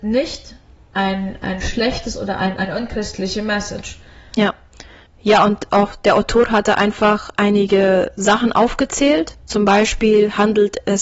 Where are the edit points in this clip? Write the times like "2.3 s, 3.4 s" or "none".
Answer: 2.6 s, 9.4 s